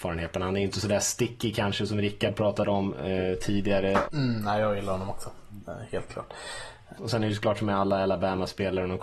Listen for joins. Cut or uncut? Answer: cut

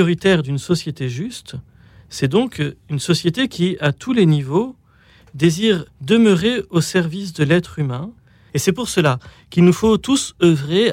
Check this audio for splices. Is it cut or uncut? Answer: cut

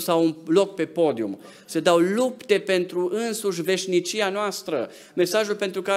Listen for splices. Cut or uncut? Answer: uncut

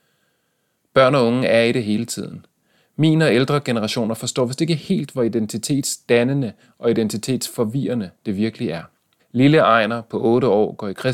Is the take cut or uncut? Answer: cut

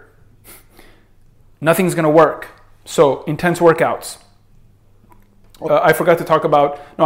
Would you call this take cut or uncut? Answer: cut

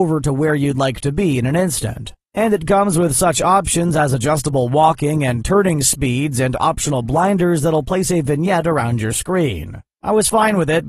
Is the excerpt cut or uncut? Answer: cut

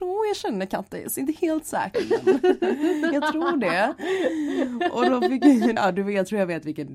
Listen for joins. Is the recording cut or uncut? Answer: cut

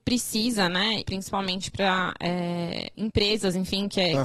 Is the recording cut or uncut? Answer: cut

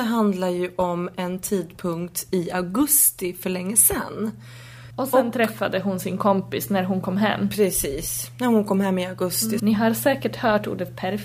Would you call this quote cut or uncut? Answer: cut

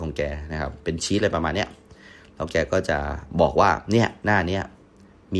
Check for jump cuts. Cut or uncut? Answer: uncut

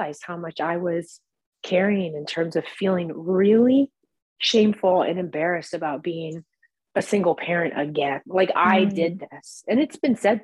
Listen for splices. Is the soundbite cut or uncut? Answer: uncut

